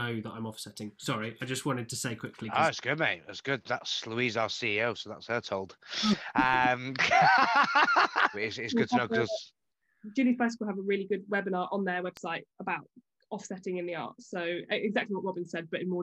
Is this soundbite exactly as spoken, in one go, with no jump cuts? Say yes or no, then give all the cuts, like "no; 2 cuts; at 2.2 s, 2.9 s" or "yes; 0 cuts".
no; 1 cut; at 8.3 s